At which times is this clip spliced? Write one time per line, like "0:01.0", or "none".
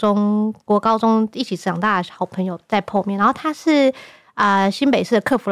none